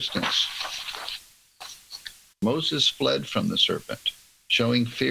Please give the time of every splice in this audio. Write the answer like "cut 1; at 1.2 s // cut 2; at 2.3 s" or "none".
cut 1; at 2.3 s